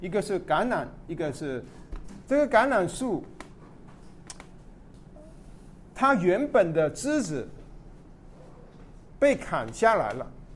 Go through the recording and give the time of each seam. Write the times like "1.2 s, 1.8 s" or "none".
2.3 s